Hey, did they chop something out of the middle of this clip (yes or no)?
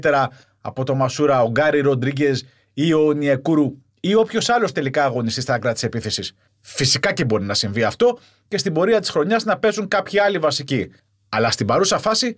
no